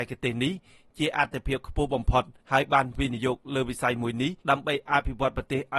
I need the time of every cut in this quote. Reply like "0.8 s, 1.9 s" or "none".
2.4 s, 4.4 s

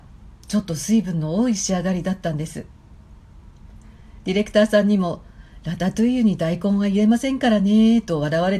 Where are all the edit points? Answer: none

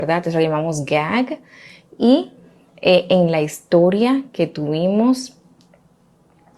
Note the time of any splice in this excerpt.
none

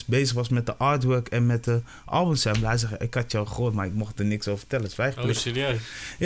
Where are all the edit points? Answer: none

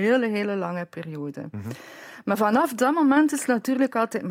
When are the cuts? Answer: none

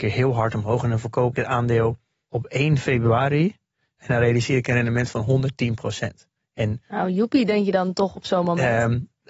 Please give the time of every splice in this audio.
none

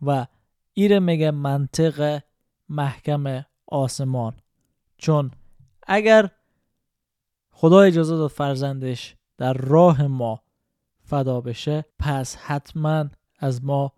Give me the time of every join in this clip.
11.9 s

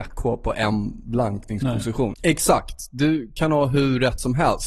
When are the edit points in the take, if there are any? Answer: 2.1 s

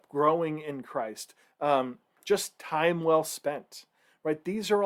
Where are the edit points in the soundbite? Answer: 1.4 s

